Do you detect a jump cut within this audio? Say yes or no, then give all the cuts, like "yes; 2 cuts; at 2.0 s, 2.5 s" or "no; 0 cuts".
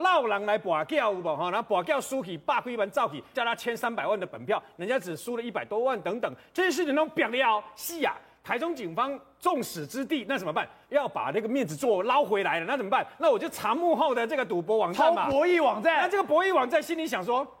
yes; 1 cut; at 3.3 s